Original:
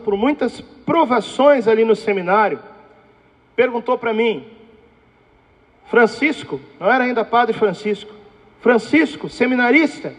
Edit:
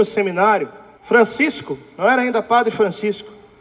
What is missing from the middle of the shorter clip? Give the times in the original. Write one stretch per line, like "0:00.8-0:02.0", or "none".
0:02.9-0:05.8

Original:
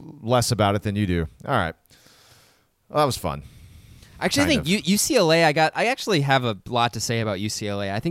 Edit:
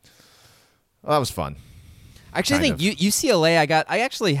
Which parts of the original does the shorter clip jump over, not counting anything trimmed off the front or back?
none

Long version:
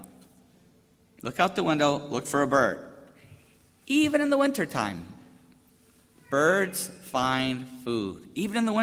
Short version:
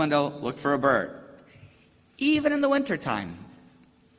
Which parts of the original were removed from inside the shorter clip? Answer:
none

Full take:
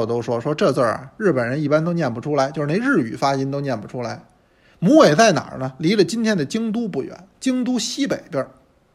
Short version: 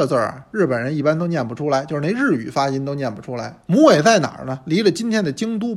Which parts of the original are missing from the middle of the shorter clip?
0:04.3-0:04.8

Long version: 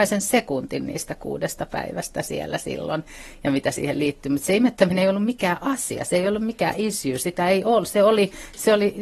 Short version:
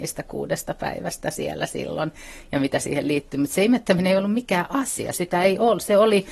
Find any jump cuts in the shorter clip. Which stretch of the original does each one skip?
0:06.0-0:07.2

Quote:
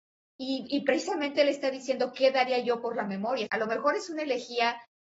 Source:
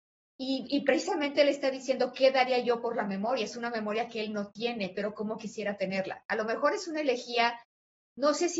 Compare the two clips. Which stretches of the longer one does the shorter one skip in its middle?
0:03.5-0:06.2

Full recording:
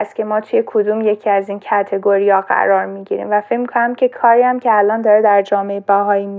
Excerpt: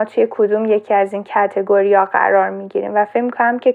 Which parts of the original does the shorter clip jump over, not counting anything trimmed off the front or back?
none

